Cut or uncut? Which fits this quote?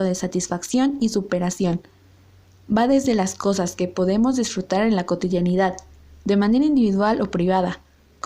uncut